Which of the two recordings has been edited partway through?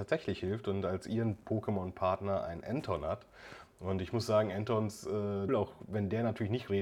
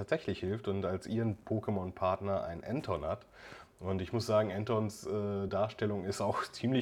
first; 1 cut; at 5.5 s

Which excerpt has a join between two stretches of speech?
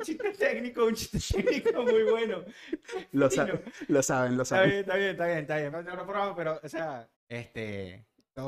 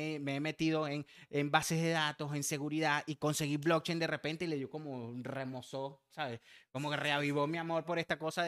first; 2 cuts; at 5.7 s, 7.1 s

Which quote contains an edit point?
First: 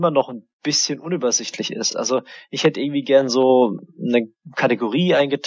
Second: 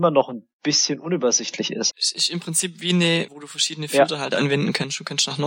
second; 2 cuts; at 1.9 s, 3.3 s

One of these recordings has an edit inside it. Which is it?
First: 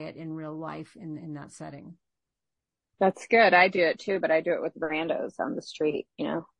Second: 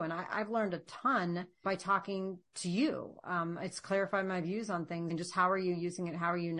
second; 2 cuts; at 1.6 s, 5.1 s

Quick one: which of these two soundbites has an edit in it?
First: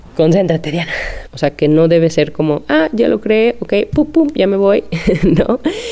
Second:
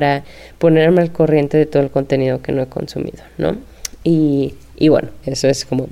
first; 1 cut; at 1.3 s

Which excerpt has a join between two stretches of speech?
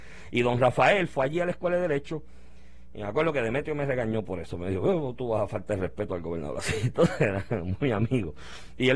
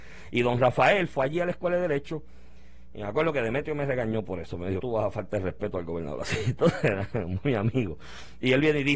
second; 1 cut; at 4.8 s

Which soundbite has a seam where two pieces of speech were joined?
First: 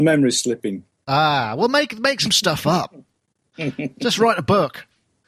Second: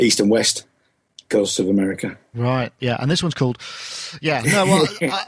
second; 1 cut; at 2.8 s

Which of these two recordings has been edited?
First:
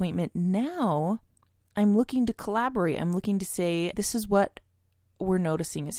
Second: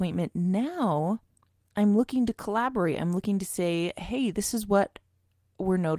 first; 1 cut; at 3.9 s

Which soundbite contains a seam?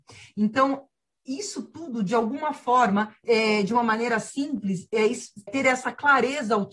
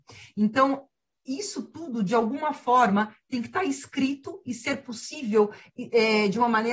first; 2 cuts; at 3.2 s, 5.5 s

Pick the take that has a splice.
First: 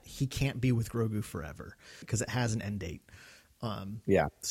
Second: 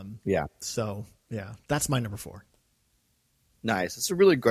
first; 1 cut; at 2.0 s

